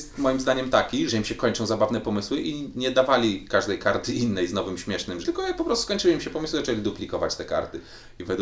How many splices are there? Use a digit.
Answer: 2